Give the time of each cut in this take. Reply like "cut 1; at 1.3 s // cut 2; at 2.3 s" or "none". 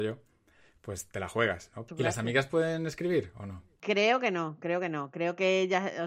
cut 1; at 1.9 s